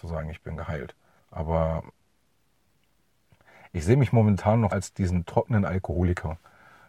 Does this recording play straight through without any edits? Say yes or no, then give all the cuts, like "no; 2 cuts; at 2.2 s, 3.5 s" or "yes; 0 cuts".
no; 2 cuts; at 1.2 s, 4.7 s